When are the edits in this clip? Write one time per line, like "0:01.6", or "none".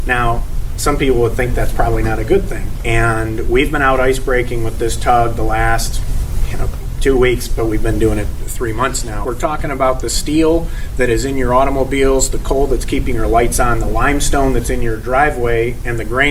0:02.8
0:09.2